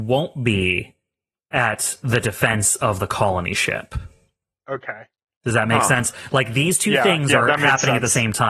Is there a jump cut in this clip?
no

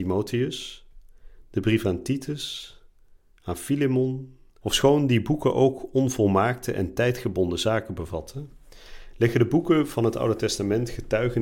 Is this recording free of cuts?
no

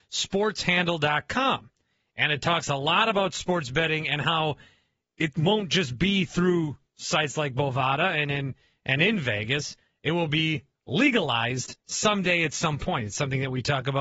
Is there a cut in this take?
no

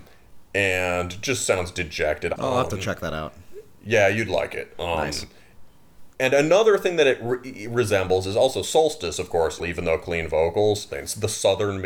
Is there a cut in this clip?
yes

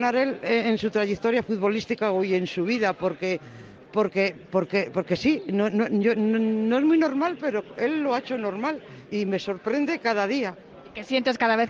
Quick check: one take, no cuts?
yes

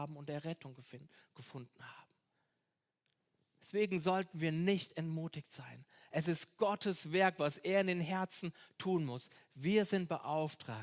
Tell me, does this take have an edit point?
no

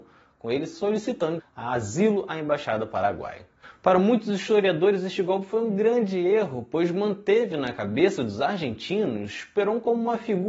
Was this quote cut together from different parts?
yes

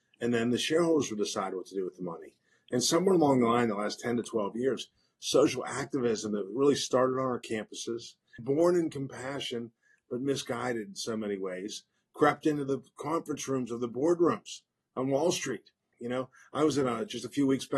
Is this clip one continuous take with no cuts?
no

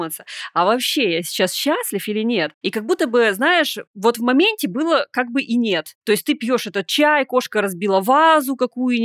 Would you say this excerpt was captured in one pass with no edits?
yes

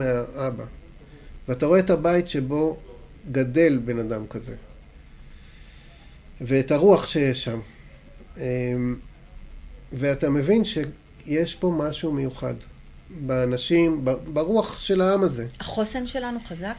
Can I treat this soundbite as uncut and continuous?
no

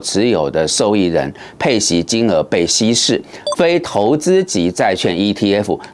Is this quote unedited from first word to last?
no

